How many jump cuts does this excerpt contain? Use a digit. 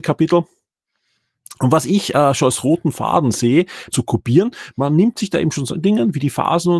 2